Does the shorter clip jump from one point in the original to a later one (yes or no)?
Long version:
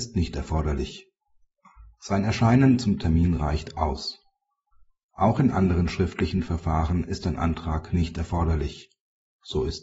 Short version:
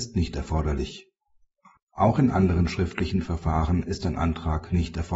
yes